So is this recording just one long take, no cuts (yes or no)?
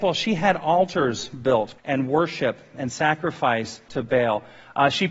no